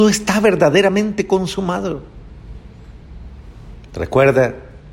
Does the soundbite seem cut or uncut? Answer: uncut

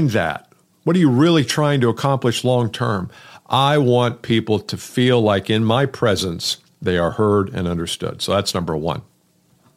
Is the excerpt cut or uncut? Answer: uncut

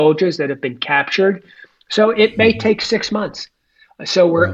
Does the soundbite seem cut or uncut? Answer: uncut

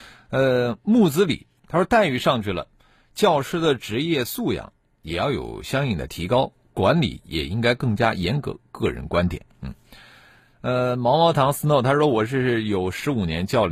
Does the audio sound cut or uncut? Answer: uncut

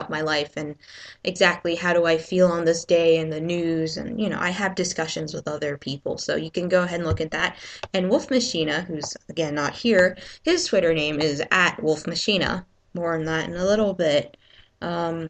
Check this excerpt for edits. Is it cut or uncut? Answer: cut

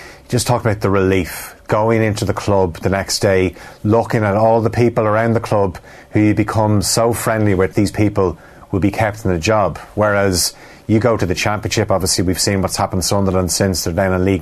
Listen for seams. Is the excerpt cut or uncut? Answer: cut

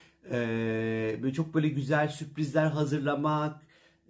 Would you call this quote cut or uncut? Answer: uncut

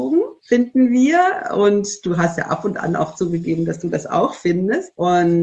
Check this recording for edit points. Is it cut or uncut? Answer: uncut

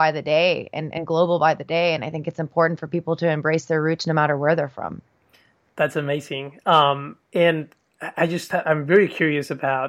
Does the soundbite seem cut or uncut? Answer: uncut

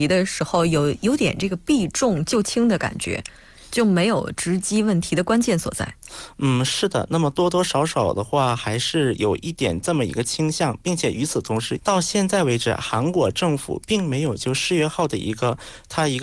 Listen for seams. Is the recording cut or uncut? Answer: cut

